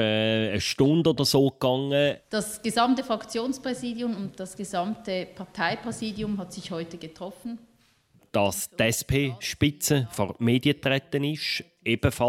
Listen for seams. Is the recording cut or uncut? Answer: uncut